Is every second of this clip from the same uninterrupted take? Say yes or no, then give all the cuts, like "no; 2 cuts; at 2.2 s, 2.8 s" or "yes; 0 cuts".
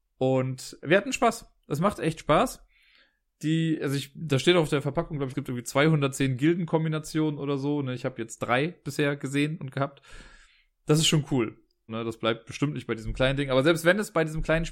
no; 2 cuts; at 5.3 s, 11.9 s